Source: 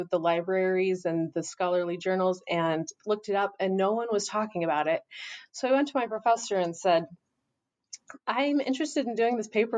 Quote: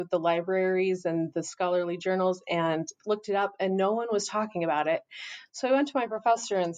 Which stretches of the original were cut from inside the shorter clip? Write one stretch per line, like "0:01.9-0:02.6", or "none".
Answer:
none